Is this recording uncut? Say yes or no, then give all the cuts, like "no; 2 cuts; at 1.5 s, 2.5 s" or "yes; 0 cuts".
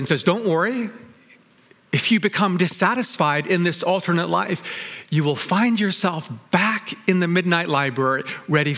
yes; 0 cuts